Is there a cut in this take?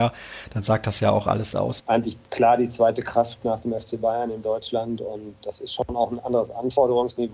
yes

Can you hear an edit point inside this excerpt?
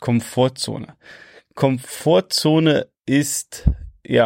no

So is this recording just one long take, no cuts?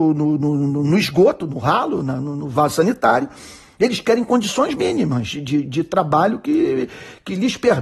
yes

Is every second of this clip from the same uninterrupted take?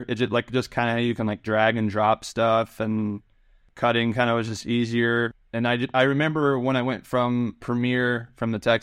yes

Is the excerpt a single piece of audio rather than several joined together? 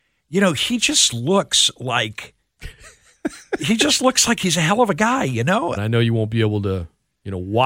no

